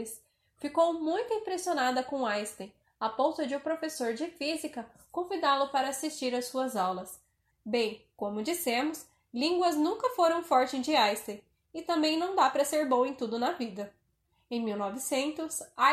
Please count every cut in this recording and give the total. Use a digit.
1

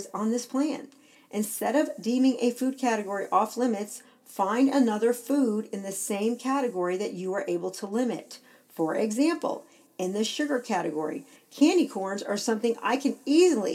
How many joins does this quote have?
0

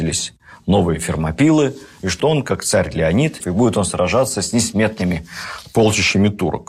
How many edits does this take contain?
2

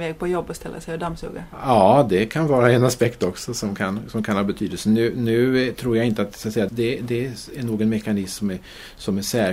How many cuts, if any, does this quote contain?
1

